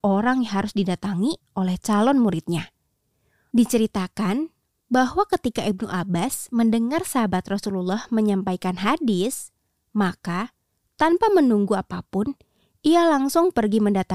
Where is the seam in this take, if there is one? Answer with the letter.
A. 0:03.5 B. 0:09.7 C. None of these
A